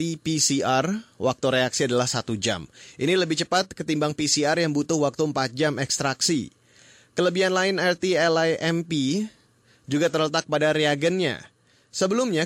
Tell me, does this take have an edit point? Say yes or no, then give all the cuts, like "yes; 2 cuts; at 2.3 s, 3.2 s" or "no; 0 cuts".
no; 0 cuts